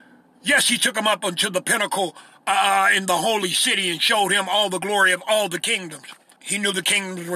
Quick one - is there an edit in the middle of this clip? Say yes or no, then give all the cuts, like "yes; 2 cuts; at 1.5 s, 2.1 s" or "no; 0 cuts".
yes; 1 cut; at 6.4 s